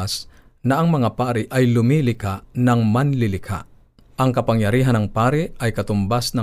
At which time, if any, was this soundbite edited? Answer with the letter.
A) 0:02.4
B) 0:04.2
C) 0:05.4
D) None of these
B